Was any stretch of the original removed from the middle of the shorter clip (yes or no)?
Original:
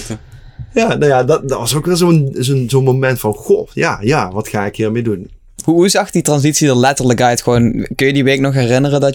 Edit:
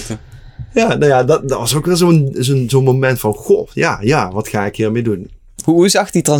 no